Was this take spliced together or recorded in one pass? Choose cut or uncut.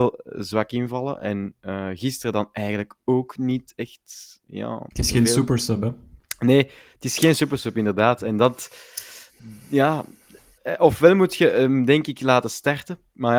uncut